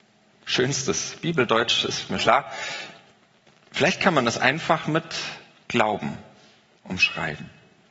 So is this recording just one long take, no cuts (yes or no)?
no